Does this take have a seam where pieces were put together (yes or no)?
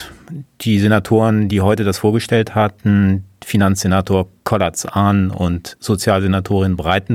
no